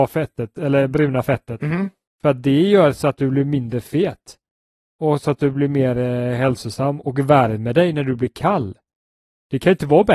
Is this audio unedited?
yes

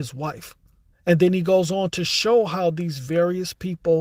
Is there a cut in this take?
yes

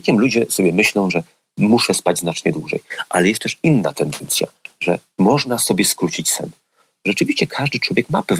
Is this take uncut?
yes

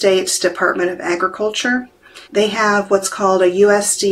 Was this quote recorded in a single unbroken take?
no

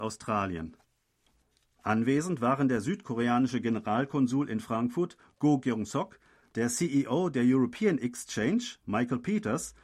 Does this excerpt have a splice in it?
yes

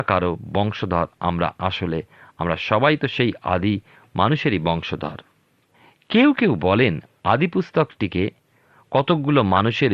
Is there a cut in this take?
no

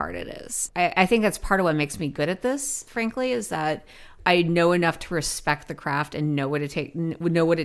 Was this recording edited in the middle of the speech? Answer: no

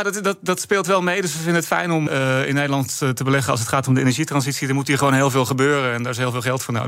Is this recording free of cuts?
no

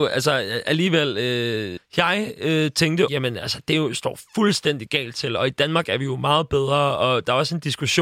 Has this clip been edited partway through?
yes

